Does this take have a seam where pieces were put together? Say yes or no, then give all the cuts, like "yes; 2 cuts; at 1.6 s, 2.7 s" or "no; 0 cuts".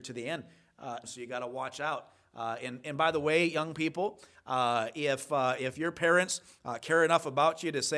yes; 1 cut; at 1.0 s